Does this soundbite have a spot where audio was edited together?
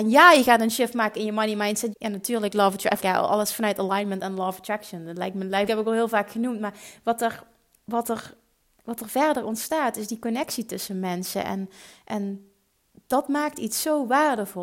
yes; 3 cuts; at 1.9 s, 3.0 s, 5.7 s

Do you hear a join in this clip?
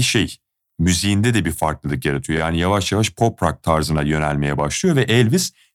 no; 0 cuts

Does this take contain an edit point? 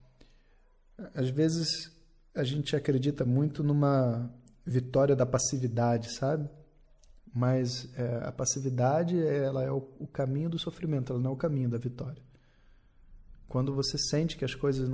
no; 0 cuts

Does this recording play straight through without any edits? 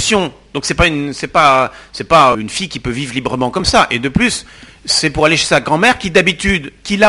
no; 1 cut; at 2.3 s

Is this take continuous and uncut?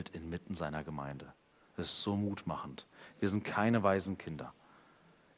yes; 0 cuts

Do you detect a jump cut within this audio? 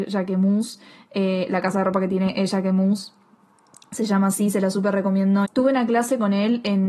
yes; 1 cut; at 5.4 s

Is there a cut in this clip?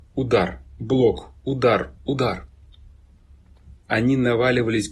yes; 1 cut; at 3.9 s

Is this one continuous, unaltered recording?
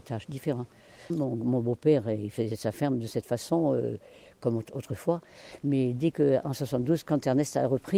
no; 1 cut; at 1.1 s

